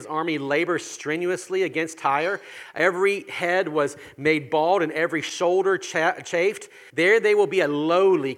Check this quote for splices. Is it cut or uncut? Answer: cut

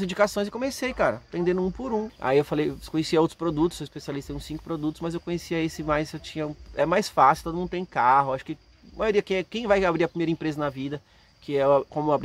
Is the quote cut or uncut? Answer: cut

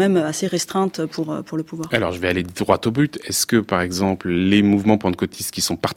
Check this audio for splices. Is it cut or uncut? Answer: uncut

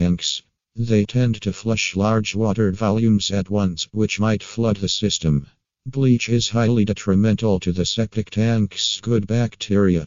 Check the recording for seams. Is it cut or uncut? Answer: cut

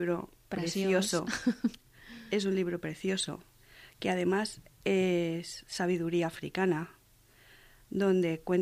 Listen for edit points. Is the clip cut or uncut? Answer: uncut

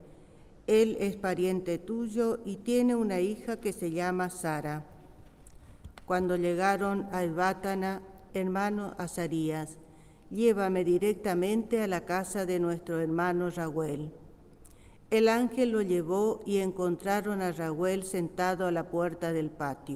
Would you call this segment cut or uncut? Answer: cut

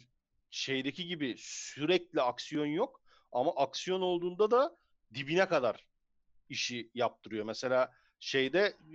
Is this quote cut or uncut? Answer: uncut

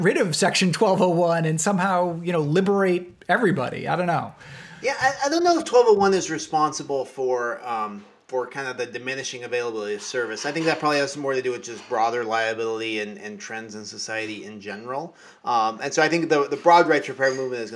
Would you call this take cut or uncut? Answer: uncut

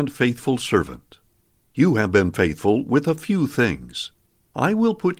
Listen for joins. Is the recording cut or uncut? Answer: uncut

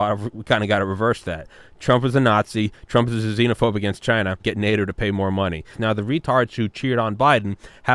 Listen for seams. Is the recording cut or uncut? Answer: cut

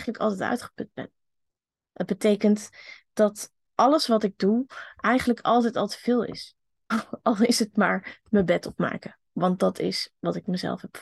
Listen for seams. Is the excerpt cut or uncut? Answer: cut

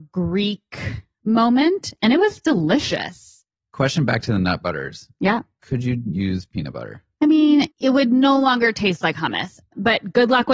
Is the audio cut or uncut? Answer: cut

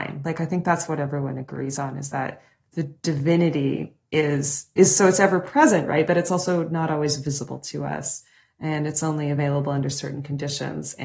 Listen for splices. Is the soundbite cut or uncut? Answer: uncut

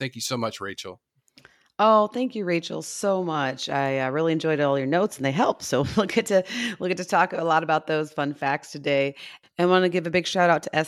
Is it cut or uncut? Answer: uncut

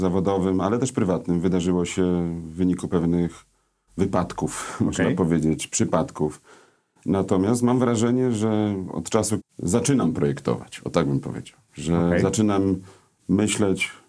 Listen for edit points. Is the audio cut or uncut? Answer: cut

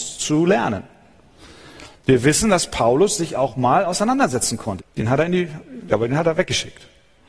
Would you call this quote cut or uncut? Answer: cut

